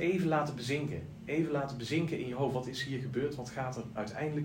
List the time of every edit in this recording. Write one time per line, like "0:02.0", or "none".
none